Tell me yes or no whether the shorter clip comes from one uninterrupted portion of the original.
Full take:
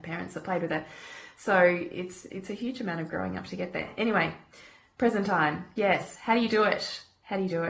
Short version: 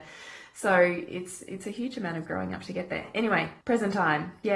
no